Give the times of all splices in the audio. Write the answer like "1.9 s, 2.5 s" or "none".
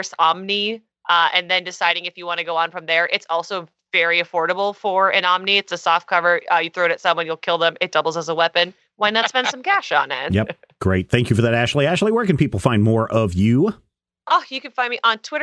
none